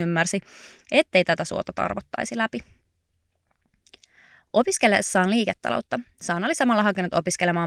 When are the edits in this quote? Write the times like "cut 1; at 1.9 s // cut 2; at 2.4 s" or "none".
none